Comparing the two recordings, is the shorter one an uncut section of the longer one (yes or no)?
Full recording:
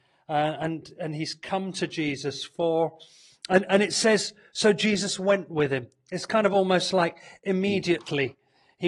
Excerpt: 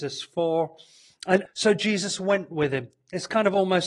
no